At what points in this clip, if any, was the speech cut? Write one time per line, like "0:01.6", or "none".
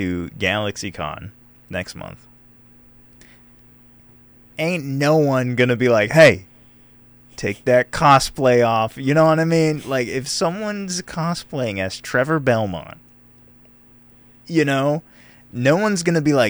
none

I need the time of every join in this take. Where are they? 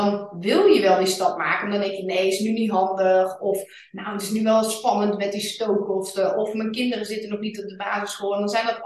none

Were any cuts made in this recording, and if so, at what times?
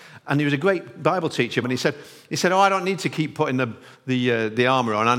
0:01.6

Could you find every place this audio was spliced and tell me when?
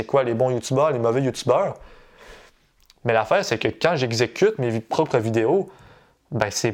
none

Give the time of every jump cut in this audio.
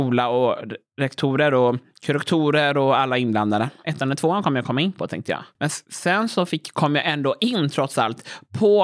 0:03.8

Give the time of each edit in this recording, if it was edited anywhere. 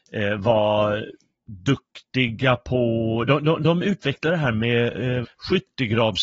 0:05.2

